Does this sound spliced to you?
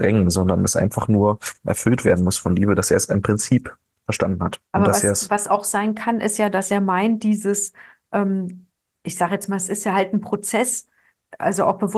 yes; 1 cut; at 4.7 s

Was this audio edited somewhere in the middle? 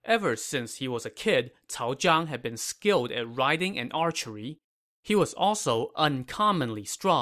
no; 0 cuts

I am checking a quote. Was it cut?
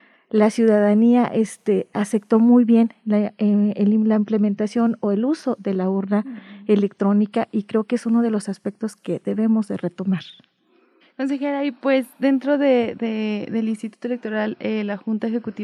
yes; 1 cut; at 11.0 s

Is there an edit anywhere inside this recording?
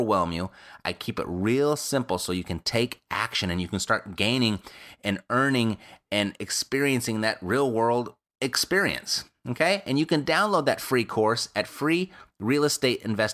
no; 0 cuts

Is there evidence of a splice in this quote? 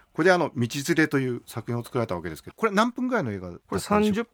yes; 1 cut; at 2.5 s

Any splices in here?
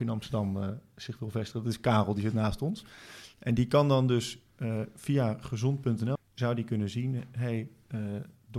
yes; 1 cut; at 6.2 s

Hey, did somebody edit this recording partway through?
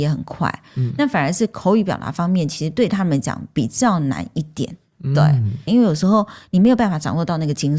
yes; 1 cut; at 5.7 s

